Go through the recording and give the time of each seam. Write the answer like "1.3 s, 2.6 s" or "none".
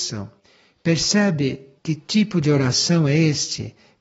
1.8 s